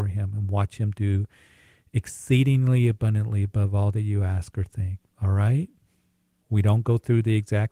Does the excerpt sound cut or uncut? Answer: cut